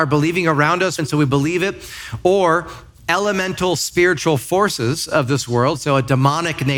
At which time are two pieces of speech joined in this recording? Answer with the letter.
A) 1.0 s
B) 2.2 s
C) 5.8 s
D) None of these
A